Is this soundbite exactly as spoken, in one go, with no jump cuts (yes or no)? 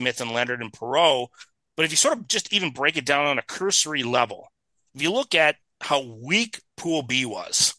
yes